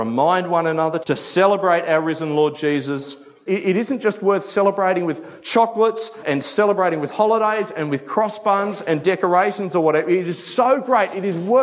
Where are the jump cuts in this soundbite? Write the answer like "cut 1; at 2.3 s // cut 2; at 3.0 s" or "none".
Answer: cut 1; at 1.0 s // cut 2; at 3.5 s // cut 3; at 6.2 s